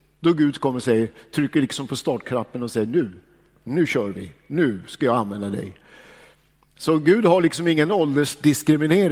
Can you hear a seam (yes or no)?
no